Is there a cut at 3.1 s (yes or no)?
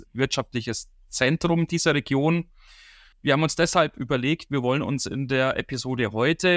yes